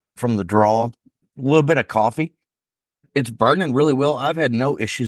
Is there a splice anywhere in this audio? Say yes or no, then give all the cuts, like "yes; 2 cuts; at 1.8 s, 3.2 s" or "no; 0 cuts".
yes; 1 cut; at 1.3 s